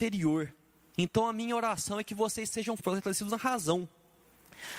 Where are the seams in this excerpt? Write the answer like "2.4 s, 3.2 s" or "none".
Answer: 0.9 s, 2.8 s